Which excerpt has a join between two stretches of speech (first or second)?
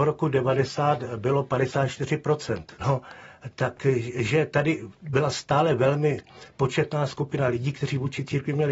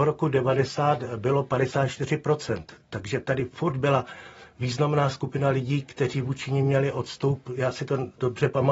first